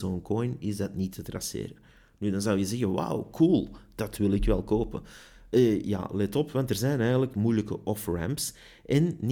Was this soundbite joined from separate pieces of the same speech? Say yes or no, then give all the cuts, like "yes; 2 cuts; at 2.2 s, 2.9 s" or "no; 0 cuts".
no; 0 cuts